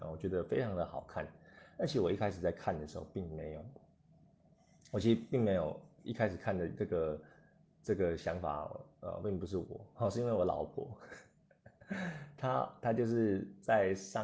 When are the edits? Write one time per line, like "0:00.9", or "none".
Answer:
none